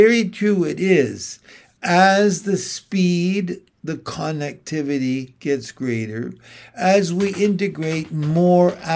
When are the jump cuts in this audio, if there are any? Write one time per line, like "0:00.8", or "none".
none